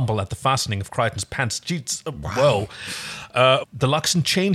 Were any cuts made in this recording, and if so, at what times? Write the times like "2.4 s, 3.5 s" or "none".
3.6 s

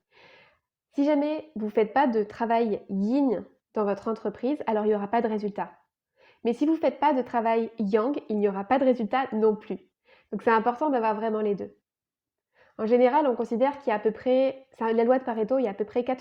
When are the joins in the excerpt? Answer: none

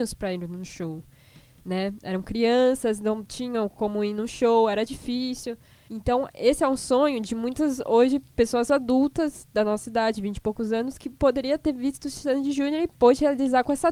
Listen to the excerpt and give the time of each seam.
none

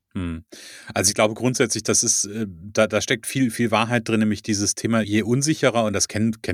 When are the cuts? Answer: 5.0 s

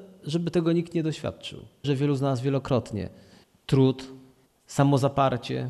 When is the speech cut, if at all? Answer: 1.8 s

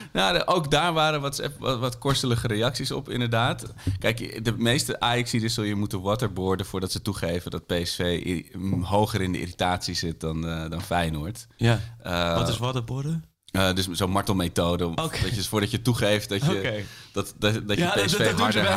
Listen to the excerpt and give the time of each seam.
none

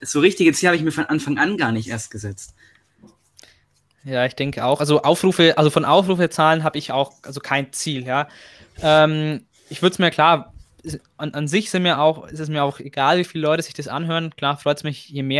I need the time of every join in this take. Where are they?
none

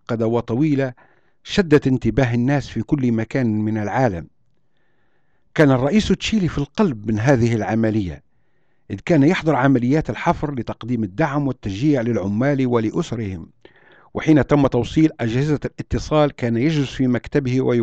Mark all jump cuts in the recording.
none

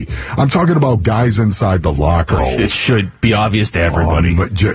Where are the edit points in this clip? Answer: 2.4 s

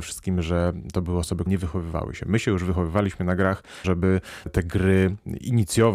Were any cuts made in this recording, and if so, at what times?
1.5 s, 3.8 s

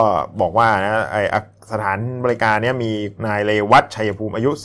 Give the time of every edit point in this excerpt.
3.2 s

